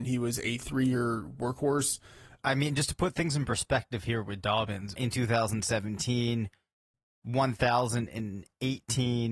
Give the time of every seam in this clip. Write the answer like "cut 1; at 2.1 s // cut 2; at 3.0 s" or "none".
cut 1; at 2.4 s // cut 2; at 5.0 s